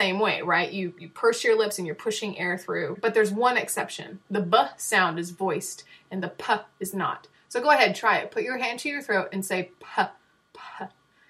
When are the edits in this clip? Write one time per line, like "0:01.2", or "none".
none